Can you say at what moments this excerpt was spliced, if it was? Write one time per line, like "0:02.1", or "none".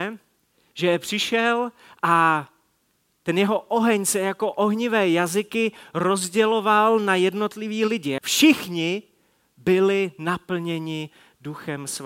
0:08.2